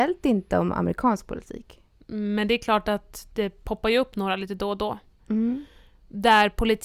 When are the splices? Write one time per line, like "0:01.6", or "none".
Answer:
0:02.0
0:05.2